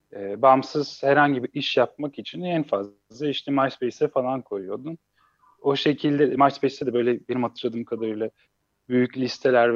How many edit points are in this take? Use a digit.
0